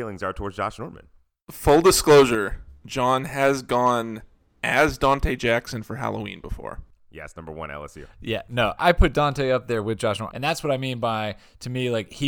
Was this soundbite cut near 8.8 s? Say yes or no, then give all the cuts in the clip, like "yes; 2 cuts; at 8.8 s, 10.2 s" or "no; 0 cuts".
yes; 2 cuts; at 8.8 s, 10.3 s